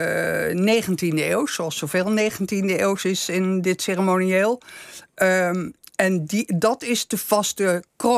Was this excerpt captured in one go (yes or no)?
yes